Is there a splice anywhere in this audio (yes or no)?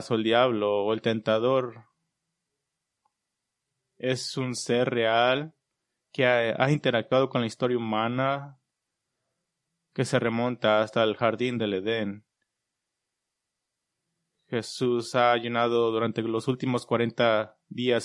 no